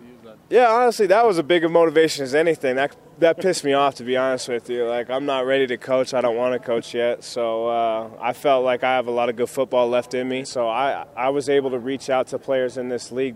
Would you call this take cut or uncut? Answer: cut